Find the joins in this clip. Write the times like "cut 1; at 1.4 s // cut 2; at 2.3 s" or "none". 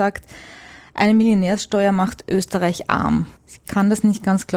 cut 1; at 3.4 s